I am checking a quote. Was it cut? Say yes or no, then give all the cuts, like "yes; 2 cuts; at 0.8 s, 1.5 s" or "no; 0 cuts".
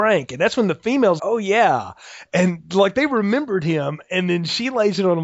yes; 1 cut; at 1.2 s